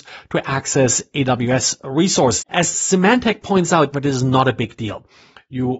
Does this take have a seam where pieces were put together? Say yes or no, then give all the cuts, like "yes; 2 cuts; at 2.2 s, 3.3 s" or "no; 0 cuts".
yes; 2 cuts; at 2.4 s, 3.9 s